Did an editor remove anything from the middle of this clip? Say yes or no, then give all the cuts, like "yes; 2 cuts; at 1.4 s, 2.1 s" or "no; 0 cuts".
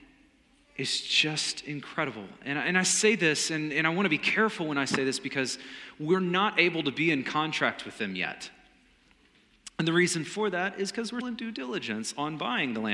yes; 1 cut; at 11.2 s